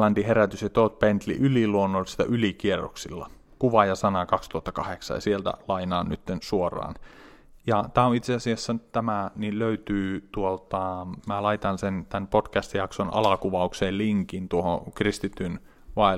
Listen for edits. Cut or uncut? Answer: uncut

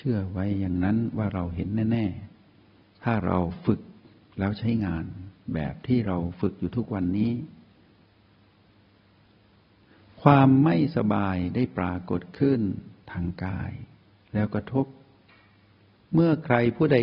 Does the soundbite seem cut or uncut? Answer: uncut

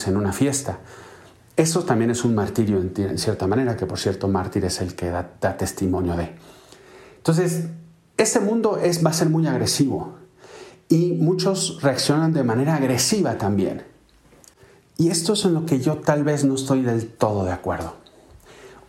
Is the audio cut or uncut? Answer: uncut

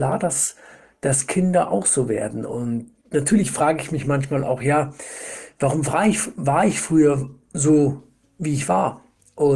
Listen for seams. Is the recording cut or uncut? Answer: uncut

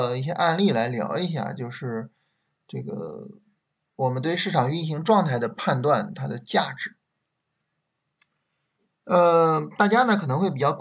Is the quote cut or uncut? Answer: uncut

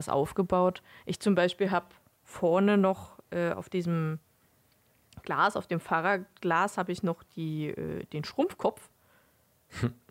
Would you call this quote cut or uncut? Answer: uncut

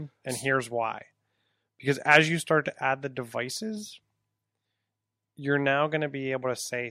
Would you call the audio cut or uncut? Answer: uncut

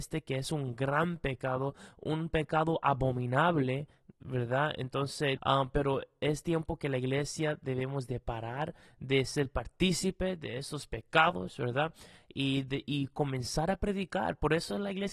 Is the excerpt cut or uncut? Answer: cut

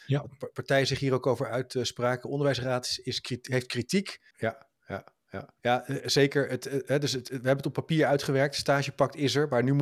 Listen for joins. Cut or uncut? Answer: cut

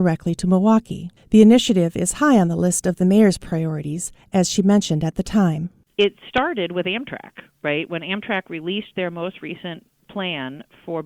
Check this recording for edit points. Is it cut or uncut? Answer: cut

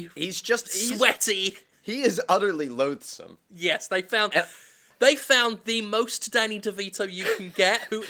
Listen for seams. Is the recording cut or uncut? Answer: uncut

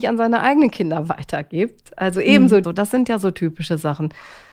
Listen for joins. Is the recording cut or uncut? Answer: cut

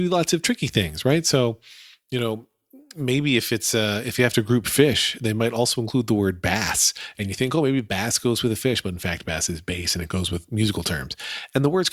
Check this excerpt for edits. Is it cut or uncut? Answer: uncut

